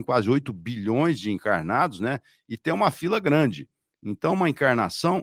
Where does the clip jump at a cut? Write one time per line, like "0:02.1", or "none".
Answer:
none